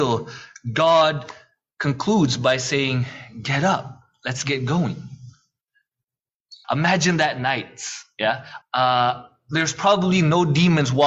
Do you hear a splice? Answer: yes; 2 cuts; at 6.6 s, 8.6 s

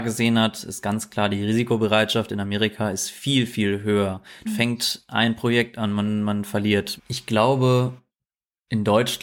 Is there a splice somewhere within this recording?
yes; 2 cuts; at 4.4 s, 7.0 s

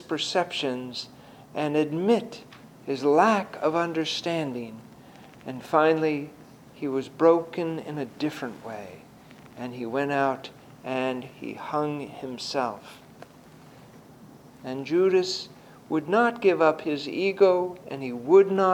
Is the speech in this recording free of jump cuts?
no; 2 cuts; at 6.6 s, 14.5 s

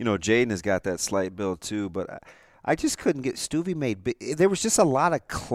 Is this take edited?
no; 0 cuts

